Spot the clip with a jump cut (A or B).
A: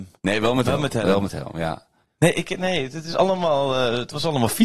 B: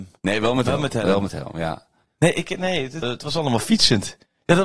B